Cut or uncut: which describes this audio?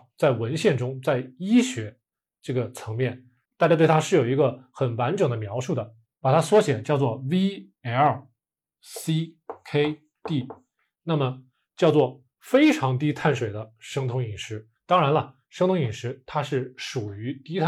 cut